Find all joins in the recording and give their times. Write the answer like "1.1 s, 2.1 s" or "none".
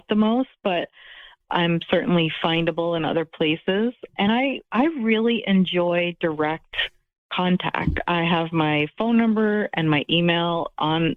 none